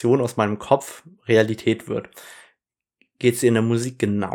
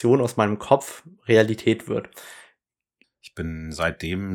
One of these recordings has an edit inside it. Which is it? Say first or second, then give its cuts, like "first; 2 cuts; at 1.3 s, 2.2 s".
second; 1 cut; at 3.0 s